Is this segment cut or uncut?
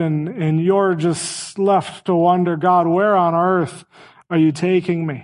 uncut